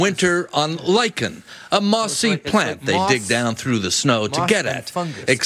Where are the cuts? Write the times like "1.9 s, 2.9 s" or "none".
none